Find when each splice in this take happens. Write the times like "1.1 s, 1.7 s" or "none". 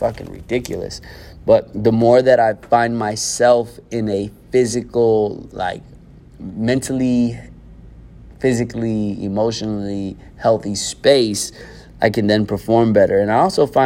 none